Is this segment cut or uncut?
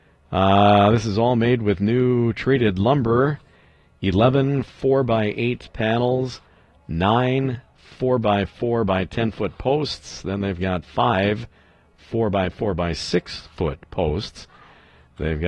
uncut